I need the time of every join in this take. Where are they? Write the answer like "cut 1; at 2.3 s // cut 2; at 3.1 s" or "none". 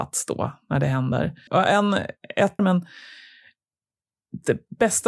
cut 1; at 1.5 s // cut 2; at 2.6 s